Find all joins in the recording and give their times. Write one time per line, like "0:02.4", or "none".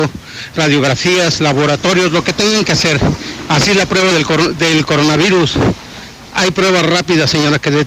none